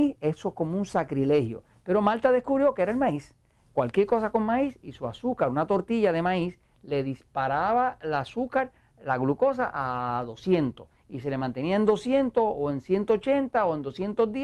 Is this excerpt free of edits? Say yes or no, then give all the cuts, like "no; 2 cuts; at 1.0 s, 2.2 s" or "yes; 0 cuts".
no; 1 cut; at 3.7 s